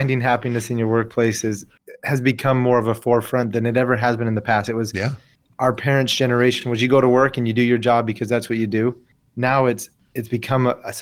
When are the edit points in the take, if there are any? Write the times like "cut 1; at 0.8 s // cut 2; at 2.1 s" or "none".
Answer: none

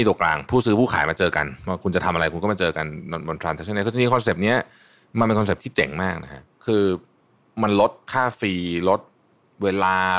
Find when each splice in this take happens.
cut 1; at 6.6 s // cut 2; at 8.0 s

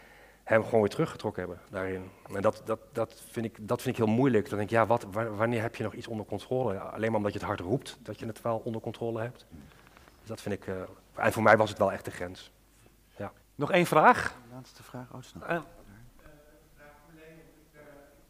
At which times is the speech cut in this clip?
cut 1; at 13.4 s

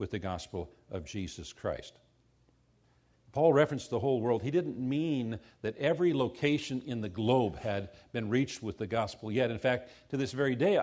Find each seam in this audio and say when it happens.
cut 1; at 3.1 s

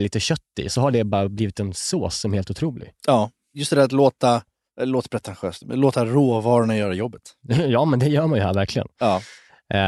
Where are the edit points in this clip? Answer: none

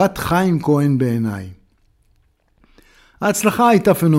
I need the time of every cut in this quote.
none

